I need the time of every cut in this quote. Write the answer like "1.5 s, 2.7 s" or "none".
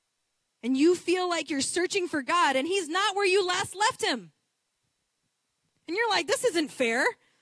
none